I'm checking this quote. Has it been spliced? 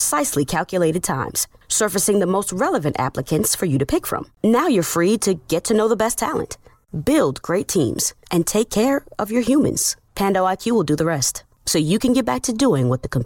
no; 0 cuts

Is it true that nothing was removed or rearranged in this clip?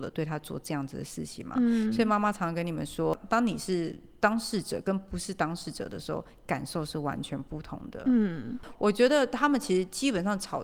yes; 0 cuts

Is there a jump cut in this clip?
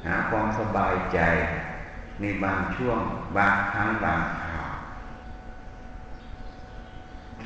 no; 0 cuts

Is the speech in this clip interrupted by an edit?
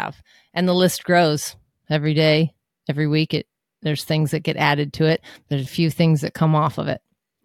yes; 1 cut; at 5.7 s

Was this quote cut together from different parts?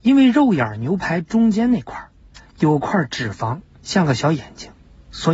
no; 0 cuts

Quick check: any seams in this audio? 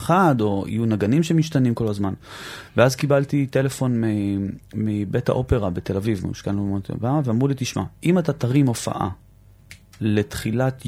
no; 0 cuts

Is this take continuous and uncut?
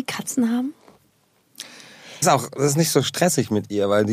no; 1 cut; at 2.2 s

